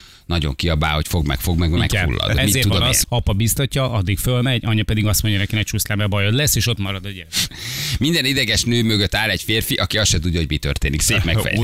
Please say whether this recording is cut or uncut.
cut